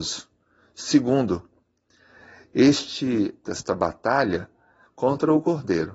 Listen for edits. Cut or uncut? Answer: cut